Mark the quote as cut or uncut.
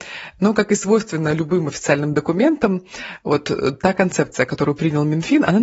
uncut